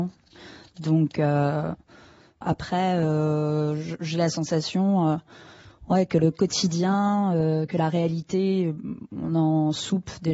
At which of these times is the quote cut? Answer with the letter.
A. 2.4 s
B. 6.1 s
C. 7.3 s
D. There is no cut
A